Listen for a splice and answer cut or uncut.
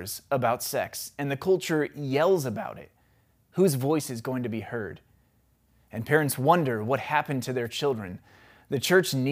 uncut